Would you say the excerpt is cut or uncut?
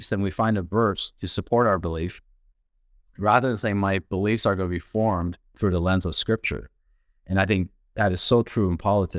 uncut